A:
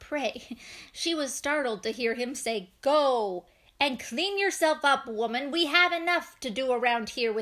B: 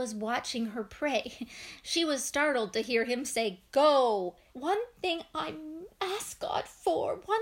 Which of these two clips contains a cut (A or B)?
B